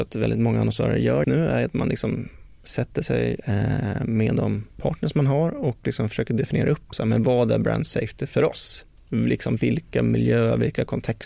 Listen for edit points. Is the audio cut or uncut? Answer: cut